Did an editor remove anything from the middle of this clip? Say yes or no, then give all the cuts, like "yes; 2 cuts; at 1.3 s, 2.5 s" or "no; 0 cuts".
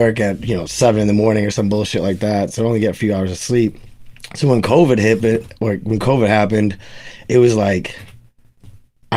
no; 0 cuts